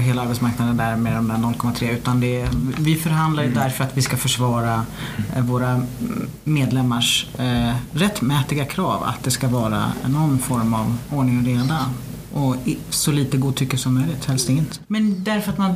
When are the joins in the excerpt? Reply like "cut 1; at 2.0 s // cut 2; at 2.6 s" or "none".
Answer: cut 1; at 14.8 s